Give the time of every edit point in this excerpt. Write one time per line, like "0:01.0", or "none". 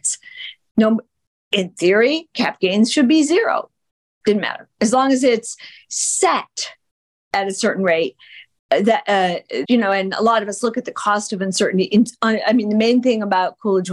0:09.6